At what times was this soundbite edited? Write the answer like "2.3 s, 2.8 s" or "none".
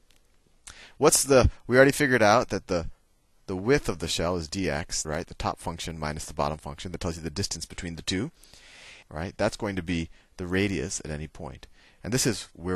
5.0 s, 9.0 s